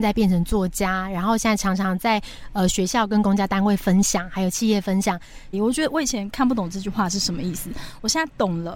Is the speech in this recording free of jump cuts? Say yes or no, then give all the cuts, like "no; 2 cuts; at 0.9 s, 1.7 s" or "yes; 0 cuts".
no; 1 cut; at 5.5 s